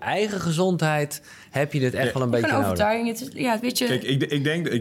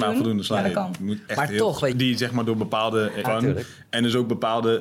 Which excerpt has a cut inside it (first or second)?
second